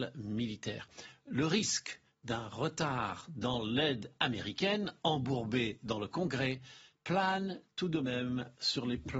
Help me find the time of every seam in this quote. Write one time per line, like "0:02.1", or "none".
none